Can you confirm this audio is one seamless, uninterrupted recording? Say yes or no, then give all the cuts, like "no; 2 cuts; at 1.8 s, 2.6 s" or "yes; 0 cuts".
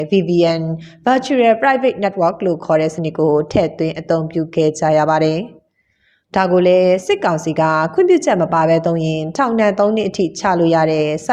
yes; 0 cuts